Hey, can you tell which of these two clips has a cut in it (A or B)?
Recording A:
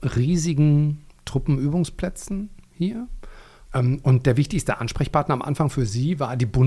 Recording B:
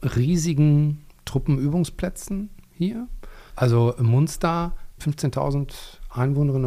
B